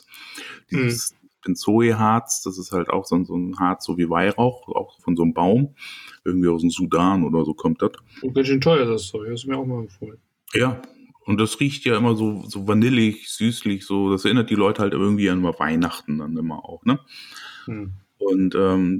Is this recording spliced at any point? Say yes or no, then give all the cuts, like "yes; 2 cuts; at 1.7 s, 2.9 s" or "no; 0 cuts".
yes; 1 cut; at 5.0 s